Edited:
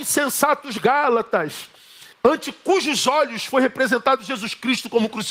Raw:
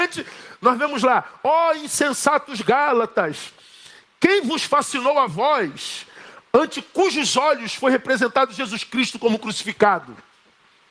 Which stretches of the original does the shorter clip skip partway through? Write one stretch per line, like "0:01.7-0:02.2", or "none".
0:04.0-0:06.4